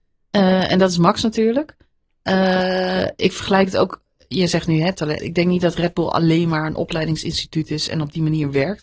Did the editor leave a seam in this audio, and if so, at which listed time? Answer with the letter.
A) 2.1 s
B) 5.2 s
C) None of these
B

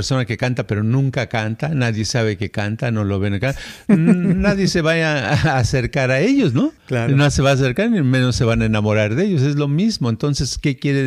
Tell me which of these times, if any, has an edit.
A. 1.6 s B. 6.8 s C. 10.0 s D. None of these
B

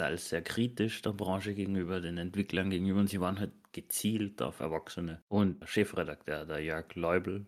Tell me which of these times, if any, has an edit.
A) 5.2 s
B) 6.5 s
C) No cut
C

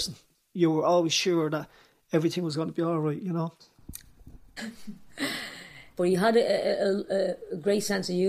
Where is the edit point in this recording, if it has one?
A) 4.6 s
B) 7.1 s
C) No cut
A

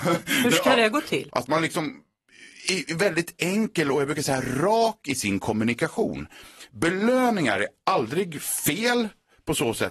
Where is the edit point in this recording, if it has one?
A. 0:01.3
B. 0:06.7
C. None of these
A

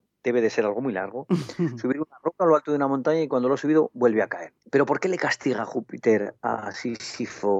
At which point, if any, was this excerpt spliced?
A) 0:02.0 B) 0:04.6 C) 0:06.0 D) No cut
B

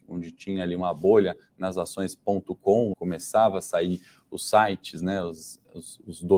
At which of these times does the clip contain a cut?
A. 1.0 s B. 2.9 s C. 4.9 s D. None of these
B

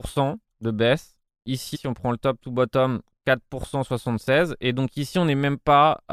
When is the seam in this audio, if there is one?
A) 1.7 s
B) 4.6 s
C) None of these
A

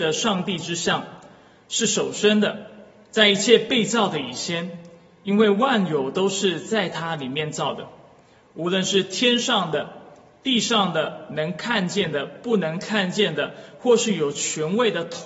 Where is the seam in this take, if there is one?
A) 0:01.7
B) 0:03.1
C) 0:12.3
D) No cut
D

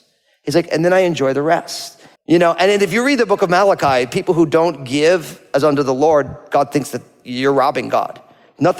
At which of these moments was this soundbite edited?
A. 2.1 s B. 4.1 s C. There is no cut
A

